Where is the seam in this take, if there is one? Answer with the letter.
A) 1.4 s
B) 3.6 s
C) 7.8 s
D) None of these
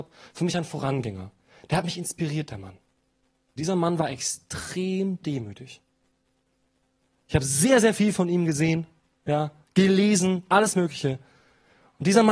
B